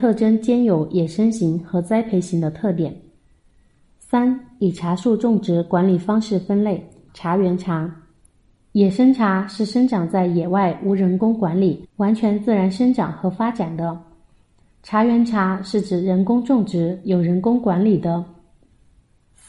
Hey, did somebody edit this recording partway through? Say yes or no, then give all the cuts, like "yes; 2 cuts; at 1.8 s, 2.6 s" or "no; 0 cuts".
yes; 1 cut; at 7.1 s